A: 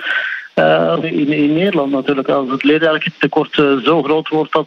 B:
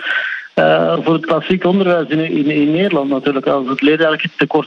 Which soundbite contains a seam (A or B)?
A